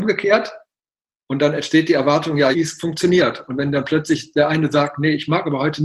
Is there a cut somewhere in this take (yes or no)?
yes